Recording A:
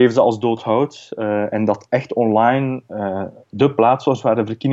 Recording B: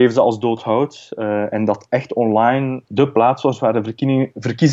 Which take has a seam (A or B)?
B